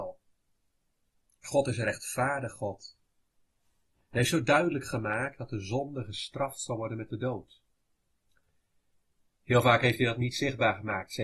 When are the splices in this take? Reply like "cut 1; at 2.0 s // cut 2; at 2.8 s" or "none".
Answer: none